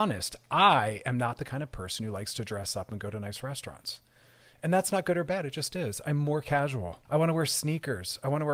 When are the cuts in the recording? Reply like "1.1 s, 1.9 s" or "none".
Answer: 7.0 s